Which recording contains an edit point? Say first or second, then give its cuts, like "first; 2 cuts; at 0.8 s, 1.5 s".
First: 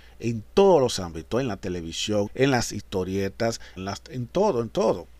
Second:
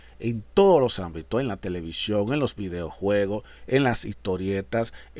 first; 2 cuts; at 2.3 s, 3.8 s